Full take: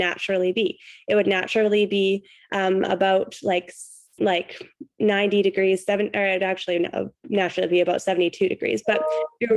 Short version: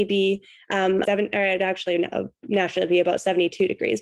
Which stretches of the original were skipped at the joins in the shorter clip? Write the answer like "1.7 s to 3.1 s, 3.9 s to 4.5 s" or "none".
2.9 s to 5.8 s